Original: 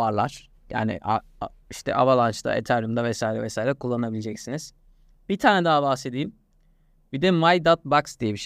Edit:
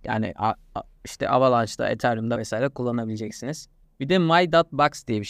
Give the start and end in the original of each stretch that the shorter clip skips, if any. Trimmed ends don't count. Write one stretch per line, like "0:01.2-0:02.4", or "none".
0:03.0-0:03.4
0:04.9-0:07.0